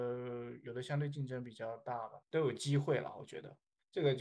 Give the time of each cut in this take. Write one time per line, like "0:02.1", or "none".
0:02.2